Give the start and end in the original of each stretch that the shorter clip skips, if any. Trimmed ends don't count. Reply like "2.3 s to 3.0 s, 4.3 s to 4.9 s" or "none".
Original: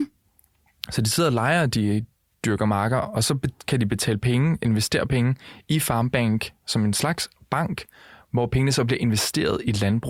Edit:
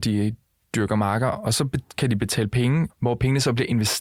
4.6 s to 8.2 s